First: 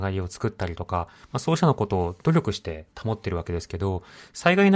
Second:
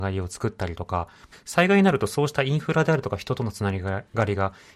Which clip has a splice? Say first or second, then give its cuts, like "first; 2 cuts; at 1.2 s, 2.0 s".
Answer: second; 1 cut; at 1.3 s